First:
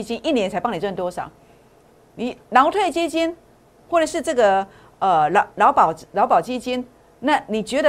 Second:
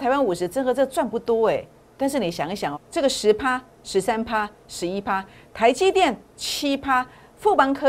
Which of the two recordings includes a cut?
second; 1 cut; at 2.7 s

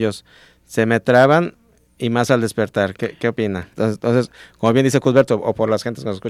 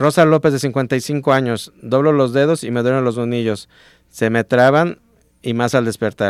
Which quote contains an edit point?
first; 2 cuts; at 3.7 s, 5.3 s

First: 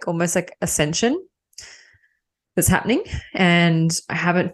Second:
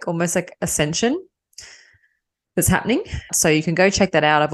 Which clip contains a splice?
second; 1 cut; at 3.3 s

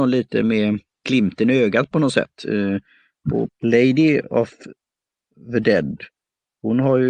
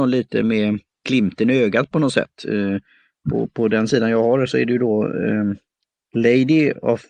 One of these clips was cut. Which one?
first; 1 cut; at 3.5 s

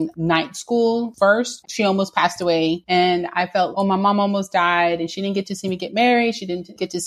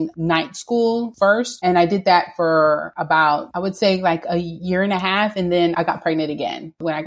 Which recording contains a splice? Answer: first; 2 cuts; at 1.6 s, 3.7 s

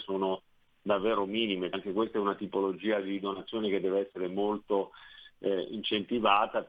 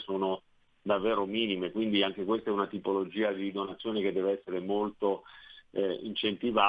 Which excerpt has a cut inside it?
first; 1 cut; at 1.7 s

